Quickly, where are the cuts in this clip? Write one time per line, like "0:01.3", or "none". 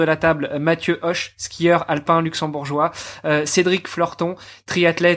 none